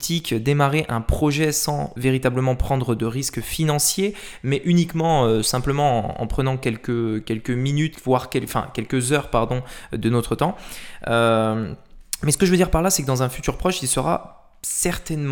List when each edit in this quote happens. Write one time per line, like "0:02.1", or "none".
0:02.0